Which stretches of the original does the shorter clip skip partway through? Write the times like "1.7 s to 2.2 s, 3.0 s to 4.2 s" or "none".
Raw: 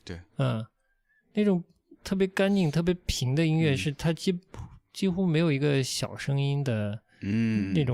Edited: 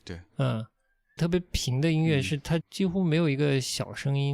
1.2 s to 2.7 s, 4.1 s to 4.8 s